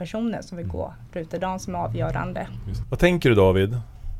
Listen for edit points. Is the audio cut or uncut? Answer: cut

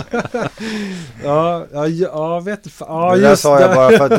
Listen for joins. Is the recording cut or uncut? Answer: uncut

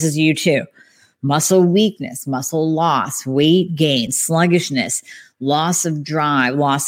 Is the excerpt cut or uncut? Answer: uncut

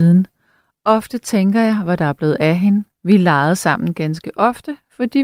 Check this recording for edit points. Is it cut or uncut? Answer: cut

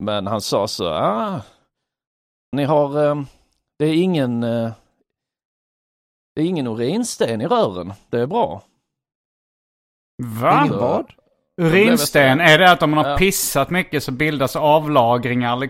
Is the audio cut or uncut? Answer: cut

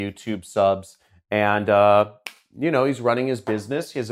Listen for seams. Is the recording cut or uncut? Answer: uncut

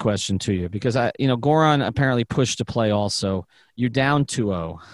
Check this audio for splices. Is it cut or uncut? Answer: uncut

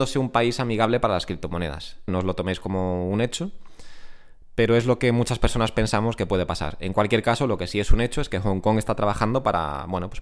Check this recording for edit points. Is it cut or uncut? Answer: cut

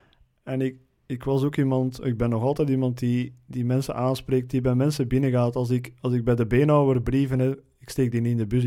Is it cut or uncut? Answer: uncut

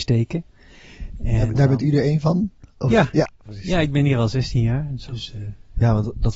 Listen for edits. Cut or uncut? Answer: uncut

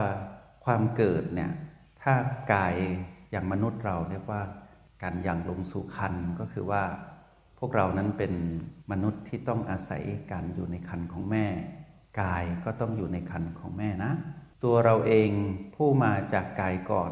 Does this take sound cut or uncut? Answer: cut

